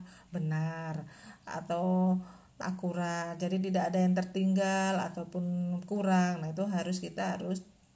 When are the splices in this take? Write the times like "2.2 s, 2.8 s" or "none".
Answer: 2.6 s